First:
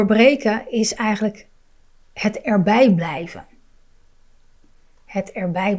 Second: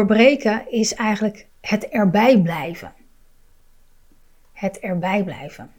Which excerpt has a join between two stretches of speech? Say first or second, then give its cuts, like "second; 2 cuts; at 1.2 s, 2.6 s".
second; 1 cut; at 1.5 s